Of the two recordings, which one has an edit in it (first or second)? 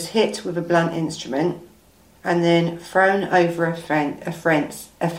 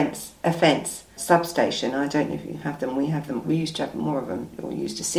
second